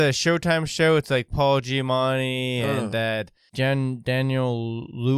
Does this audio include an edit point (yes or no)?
no